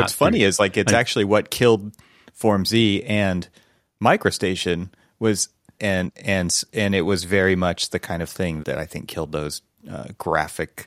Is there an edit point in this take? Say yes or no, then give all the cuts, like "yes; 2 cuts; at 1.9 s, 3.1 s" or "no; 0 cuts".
yes; 2 cuts; at 5.8 s, 8.6 s